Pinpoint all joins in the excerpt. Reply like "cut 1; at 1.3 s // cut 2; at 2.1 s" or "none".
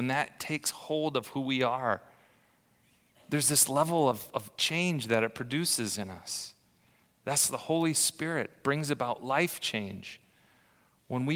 none